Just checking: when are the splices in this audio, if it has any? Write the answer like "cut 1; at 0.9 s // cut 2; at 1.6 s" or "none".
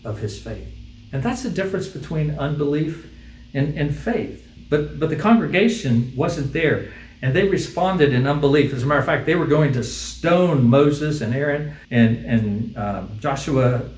cut 1; at 11.8 s